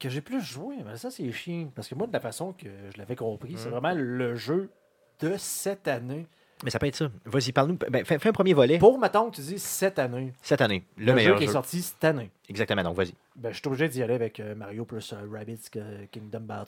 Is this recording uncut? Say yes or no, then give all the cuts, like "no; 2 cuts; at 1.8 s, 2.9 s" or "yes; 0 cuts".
yes; 0 cuts